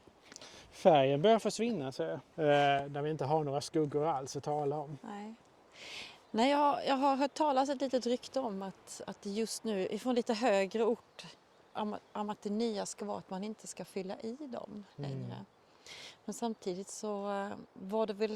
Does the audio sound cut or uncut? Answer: cut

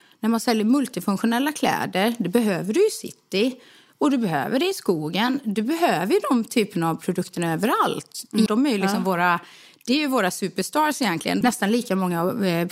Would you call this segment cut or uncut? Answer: cut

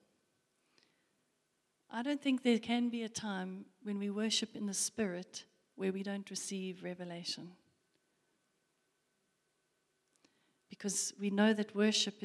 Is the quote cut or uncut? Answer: uncut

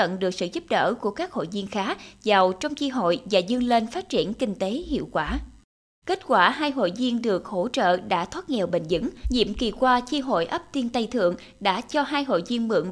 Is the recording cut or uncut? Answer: cut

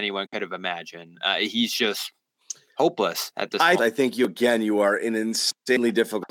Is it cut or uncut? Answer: cut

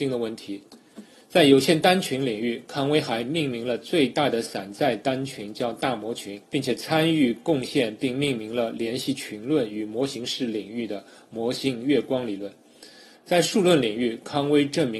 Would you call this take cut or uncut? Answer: cut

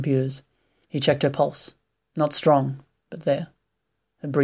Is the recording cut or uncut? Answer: uncut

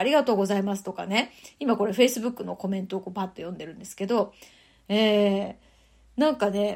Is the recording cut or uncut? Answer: uncut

